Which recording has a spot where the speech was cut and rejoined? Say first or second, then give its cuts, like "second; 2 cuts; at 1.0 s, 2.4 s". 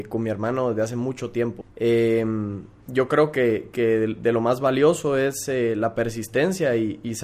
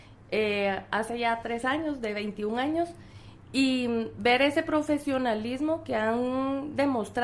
first; 1 cut; at 1.6 s